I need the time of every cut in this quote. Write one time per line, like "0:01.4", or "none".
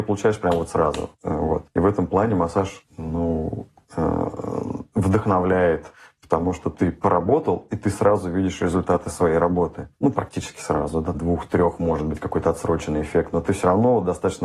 0:11.1